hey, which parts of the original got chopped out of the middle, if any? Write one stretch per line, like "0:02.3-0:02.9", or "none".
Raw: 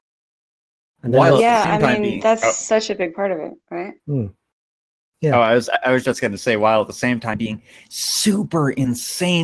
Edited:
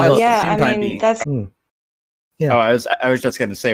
0:02.4-0:04.0